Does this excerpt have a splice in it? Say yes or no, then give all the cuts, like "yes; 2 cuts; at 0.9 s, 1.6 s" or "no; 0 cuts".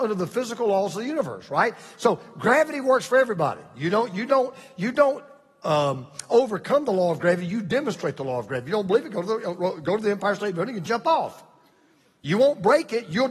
no; 0 cuts